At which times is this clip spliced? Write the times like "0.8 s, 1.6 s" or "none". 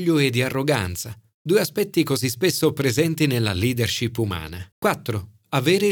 4.7 s